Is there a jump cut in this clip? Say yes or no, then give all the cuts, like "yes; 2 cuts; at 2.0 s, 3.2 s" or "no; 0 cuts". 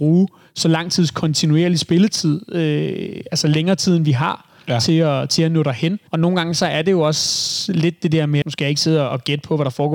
yes; 2 cuts; at 6.1 s, 8.4 s